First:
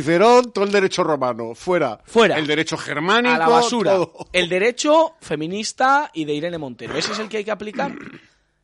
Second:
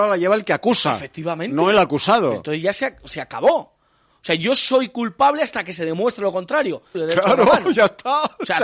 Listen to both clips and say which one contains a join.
second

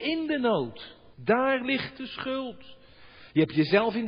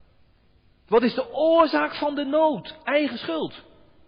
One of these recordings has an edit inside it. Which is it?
first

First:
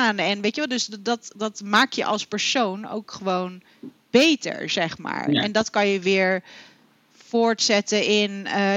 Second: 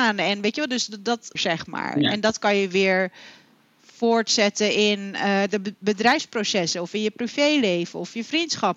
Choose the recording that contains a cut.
second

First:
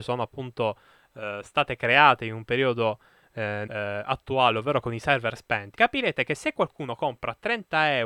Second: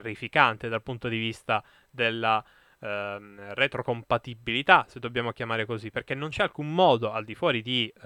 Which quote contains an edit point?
first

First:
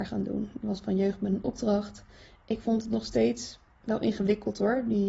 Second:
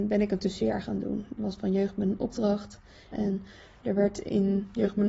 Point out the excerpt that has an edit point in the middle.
second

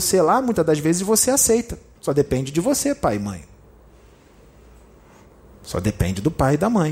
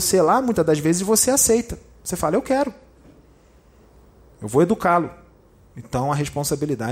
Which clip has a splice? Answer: first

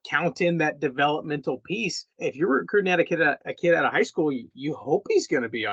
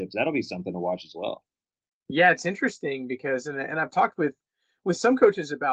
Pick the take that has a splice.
first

